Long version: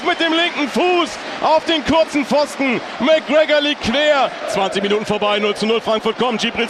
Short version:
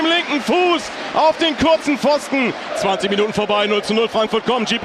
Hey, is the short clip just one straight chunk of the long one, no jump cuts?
no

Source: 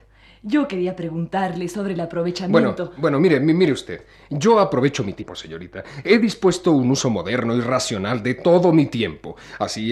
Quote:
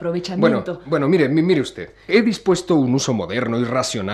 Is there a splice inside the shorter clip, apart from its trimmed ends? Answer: yes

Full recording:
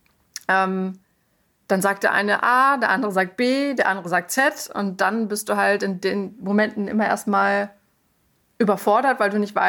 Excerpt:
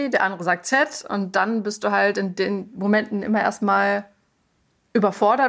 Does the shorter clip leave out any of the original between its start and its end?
no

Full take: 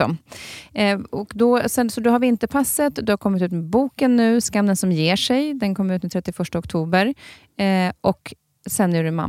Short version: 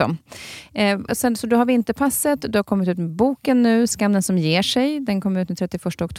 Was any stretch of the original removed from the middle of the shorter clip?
yes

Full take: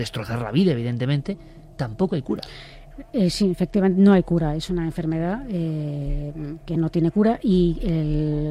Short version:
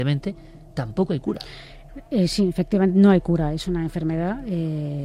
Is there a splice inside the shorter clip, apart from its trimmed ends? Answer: no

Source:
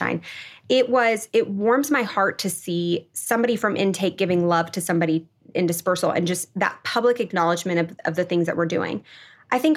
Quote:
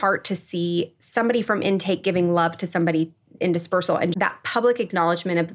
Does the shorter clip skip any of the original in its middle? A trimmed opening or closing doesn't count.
yes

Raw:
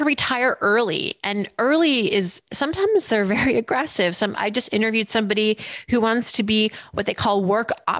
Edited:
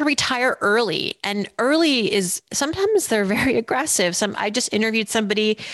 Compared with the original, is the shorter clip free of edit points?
yes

